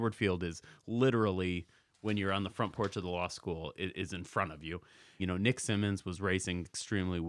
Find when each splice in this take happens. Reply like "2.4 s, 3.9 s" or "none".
5.2 s